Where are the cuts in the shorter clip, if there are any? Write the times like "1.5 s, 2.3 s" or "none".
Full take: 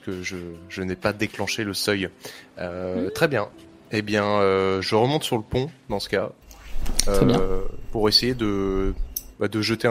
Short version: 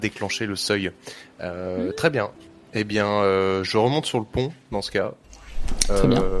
none